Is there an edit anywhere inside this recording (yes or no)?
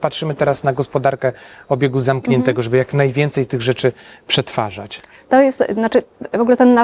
yes